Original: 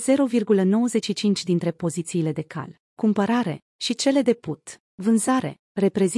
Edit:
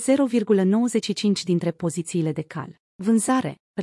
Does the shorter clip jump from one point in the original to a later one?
yes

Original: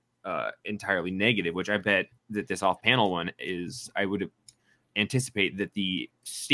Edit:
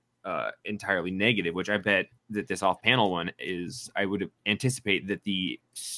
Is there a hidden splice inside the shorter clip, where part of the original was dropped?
yes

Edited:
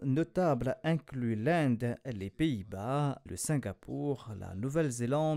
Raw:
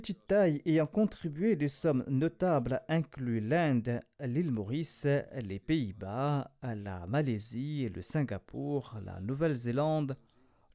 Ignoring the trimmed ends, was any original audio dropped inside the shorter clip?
yes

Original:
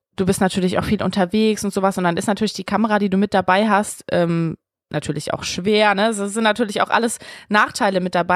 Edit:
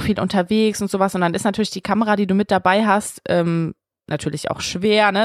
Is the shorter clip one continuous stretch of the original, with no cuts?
yes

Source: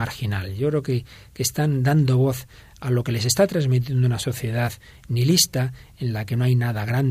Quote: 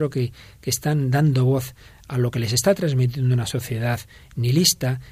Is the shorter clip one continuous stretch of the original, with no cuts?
yes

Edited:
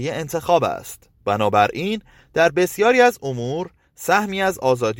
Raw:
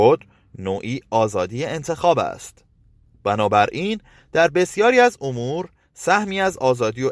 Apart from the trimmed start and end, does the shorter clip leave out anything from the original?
yes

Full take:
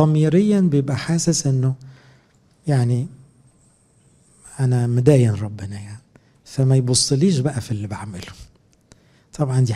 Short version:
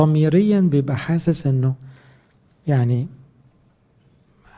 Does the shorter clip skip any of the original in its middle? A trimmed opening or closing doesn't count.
no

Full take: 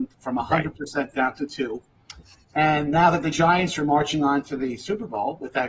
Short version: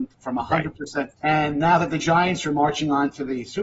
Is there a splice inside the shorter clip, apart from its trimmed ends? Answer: yes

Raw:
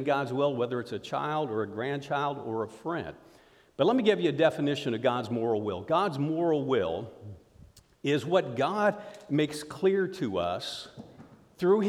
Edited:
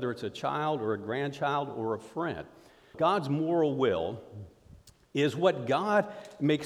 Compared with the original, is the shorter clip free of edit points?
no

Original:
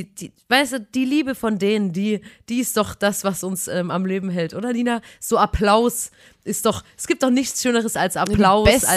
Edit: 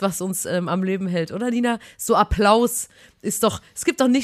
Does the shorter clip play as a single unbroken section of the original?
yes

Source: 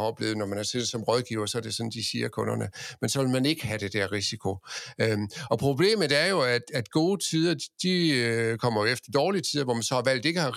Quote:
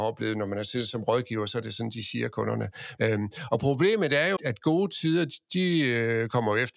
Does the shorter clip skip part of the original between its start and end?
yes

